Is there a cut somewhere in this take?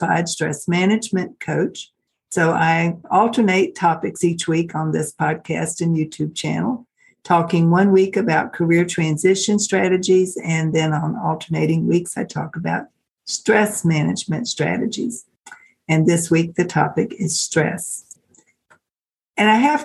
no; 0 cuts

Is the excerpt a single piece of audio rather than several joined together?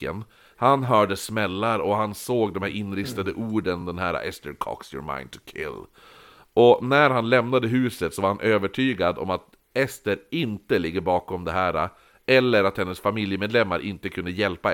yes; 0 cuts

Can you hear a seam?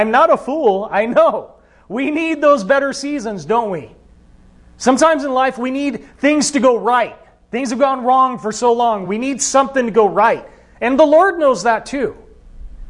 no; 0 cuts

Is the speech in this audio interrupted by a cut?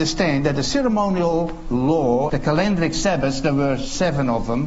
yes; 1 cut; at 2.3 s

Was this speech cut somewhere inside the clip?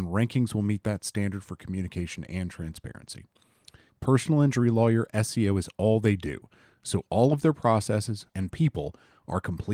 yes; 2 cuts; at 3.9 s, 8.3 s

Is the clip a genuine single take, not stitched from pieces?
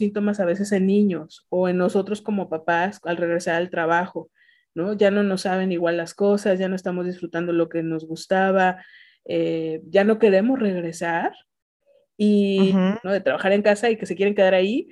no; 1 cut; at 13.0 s

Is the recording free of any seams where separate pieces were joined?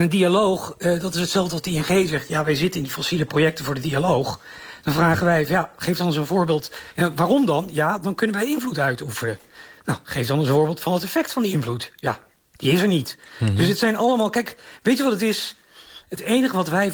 yes; 0 cuts

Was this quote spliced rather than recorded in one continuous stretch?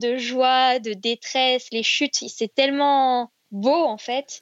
no; 0 cuts

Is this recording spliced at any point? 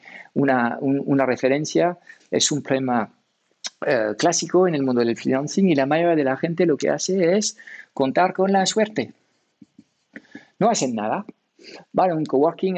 yes; 1 cut; at 2.2 s

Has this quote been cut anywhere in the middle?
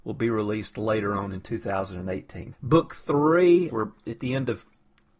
yes; 2 cuts; at 2.5 s, 3.7 s

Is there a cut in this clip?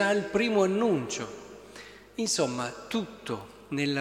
no; 0 cuts

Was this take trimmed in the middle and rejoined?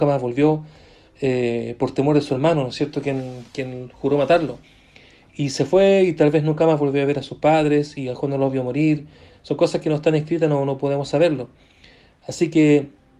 no; 0 cuts

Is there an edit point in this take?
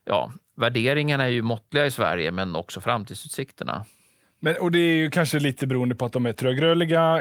no; 0 cuts

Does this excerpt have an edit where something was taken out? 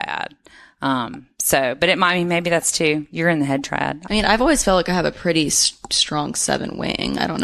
yes; 1 cut; at 4.1 s

